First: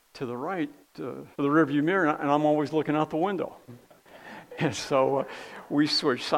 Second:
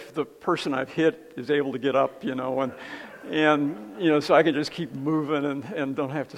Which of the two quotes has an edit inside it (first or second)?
first